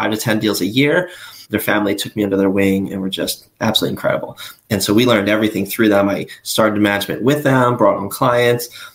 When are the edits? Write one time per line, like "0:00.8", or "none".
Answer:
0:01.4